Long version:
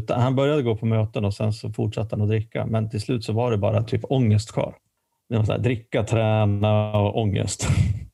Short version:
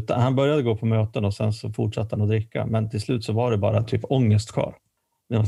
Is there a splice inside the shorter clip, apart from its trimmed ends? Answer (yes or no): no